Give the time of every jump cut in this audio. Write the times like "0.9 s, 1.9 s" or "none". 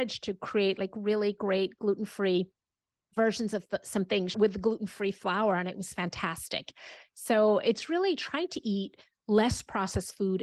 4.3 s